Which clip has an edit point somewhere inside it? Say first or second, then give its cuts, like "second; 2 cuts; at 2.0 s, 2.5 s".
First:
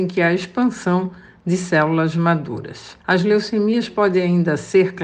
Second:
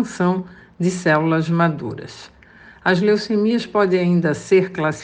first; 1 cut; at 3.0 s